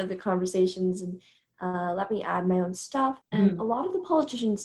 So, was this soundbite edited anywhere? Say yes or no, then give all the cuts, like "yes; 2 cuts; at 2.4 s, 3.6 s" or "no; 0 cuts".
yes; 1 cut; at 3.2 s